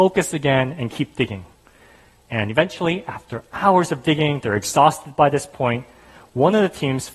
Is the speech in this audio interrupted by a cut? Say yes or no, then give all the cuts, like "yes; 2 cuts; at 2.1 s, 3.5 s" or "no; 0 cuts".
no; 0 cuts